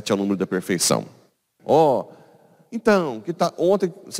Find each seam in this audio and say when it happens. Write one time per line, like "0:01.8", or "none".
0:01.6